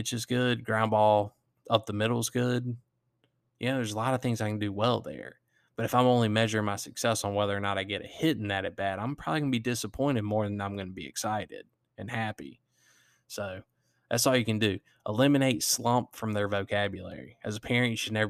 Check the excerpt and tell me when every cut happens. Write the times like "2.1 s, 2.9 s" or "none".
none